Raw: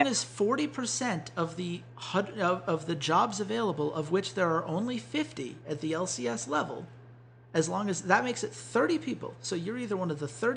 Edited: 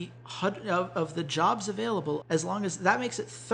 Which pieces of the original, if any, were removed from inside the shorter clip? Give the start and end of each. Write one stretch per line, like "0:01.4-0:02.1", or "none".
0:03.9-0:07.5